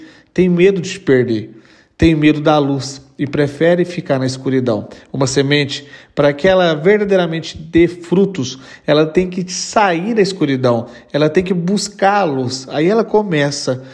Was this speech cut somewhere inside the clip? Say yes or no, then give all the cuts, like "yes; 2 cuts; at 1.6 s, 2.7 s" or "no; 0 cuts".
no; 0 cuts